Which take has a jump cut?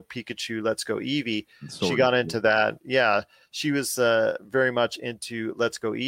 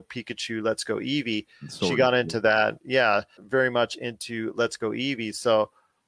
second; 1 cut; at 3.4 s

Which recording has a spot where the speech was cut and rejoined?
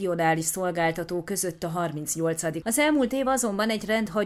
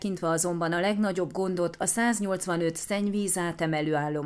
first; 1 cut; at 2.6 s

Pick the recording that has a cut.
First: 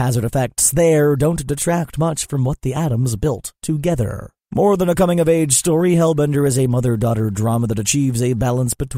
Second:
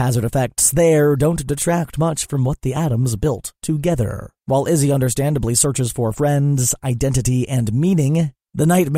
second; 1 cut; at 4.4 s

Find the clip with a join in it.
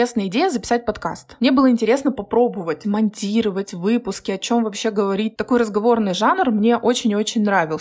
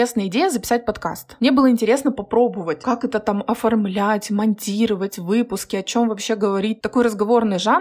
first; 1 cut; at 2.8 s

